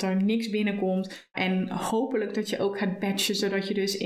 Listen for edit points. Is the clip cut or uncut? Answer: cut